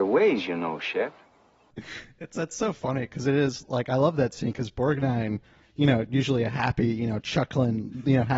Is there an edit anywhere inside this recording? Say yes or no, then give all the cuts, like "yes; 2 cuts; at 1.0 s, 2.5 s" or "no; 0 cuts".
no; 0 cuts